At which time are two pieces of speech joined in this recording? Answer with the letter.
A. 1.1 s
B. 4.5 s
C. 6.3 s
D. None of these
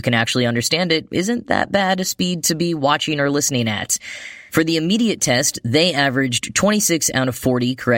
B